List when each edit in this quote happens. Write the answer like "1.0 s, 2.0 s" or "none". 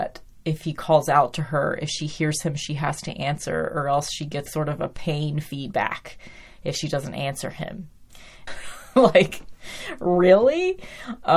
4.5 s, 8.5 s